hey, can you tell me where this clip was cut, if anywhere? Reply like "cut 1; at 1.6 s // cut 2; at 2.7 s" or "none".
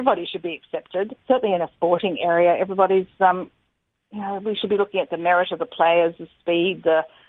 cut 1; at 1.2 s